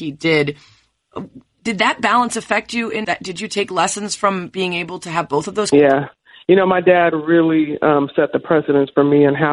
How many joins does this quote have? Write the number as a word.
two